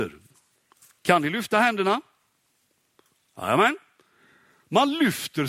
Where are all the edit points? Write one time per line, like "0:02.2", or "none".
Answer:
none